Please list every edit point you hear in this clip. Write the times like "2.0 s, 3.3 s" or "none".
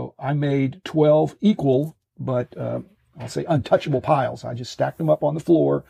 none